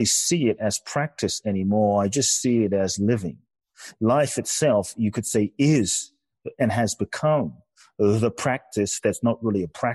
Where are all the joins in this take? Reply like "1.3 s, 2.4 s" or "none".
none